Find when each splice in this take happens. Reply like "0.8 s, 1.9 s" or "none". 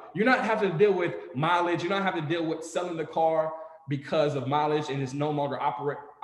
none